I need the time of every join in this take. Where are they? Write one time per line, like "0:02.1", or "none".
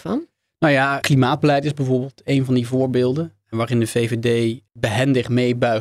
0:01.0